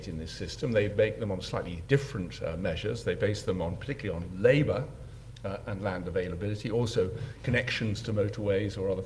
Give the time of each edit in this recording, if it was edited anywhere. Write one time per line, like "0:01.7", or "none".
none